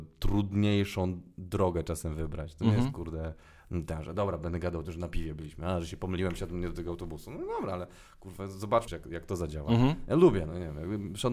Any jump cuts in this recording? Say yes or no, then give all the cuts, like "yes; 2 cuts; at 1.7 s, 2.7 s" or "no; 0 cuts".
yes; 1 cut; at 8.9 s